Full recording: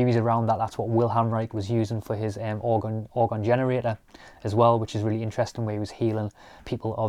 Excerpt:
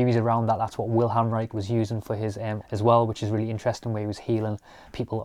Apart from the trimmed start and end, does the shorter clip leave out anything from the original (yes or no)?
yes